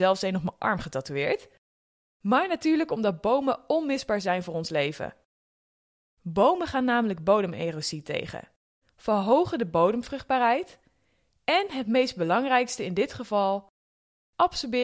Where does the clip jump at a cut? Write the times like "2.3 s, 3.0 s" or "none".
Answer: 8.8 s